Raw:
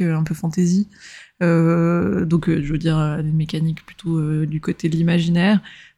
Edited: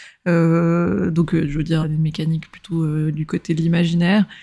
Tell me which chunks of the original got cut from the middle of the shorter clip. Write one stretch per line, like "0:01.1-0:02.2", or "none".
0:03.0-0:03.2